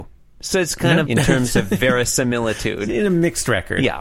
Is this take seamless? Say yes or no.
no